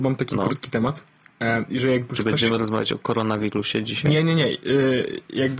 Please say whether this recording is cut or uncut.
uncut